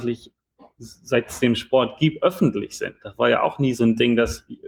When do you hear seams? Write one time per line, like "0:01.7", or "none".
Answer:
none